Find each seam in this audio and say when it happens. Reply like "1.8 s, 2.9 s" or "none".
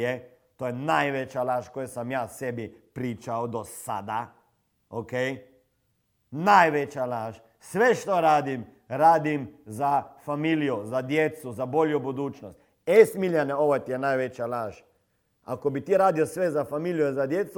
none